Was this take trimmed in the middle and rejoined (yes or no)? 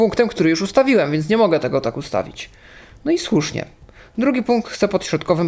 no